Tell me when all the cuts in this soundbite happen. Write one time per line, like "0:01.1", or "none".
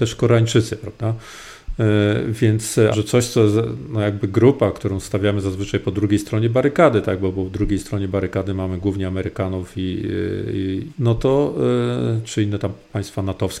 0:02.9
0:10.9